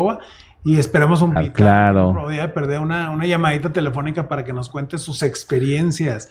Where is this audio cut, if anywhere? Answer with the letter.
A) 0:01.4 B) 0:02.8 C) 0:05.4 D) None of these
A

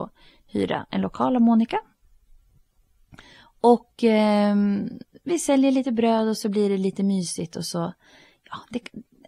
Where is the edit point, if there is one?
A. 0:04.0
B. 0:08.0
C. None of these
C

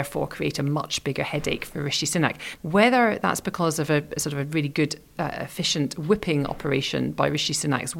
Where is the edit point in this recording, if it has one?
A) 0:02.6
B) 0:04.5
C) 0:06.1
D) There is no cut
A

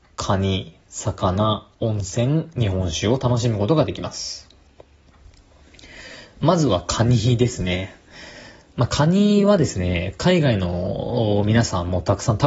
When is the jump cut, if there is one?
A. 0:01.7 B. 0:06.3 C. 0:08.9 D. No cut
A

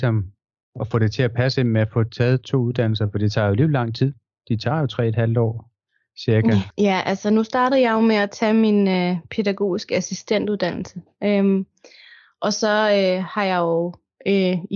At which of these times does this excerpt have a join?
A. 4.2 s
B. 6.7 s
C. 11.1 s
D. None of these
B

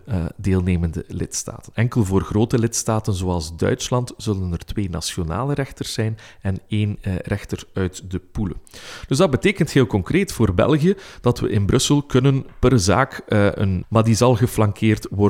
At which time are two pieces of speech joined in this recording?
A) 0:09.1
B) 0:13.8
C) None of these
B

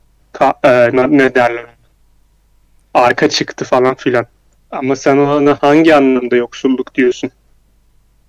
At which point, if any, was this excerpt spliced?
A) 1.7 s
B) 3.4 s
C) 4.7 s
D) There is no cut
C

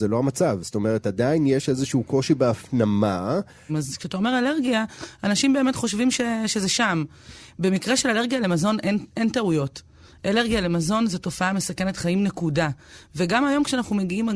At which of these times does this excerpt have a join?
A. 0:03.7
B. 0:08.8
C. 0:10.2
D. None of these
A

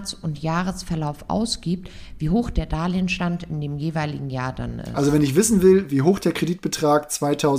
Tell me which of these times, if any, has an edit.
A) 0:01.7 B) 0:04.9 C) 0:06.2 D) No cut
D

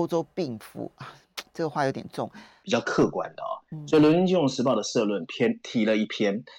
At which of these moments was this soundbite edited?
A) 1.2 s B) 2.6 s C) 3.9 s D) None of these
B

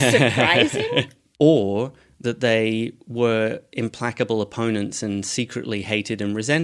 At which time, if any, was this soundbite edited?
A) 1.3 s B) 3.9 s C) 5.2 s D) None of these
A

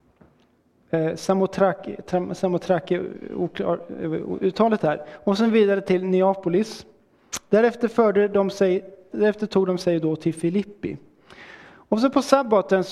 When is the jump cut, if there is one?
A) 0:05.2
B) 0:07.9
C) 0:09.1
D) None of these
C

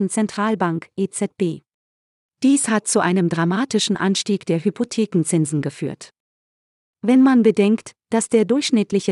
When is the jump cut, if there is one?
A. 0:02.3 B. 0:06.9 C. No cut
A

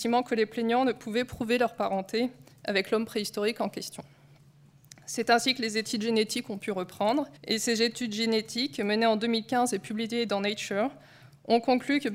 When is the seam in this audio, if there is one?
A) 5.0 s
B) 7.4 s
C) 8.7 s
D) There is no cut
B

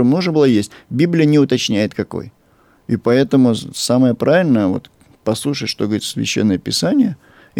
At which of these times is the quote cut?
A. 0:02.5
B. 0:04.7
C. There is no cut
C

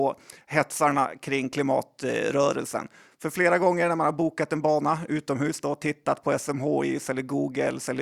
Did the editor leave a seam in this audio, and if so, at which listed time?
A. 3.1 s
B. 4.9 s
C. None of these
C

